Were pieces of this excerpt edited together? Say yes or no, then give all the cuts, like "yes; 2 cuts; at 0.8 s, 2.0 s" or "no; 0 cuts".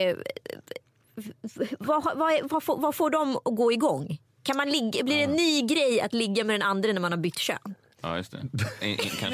no; 0 cuts